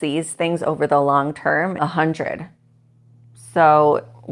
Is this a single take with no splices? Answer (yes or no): no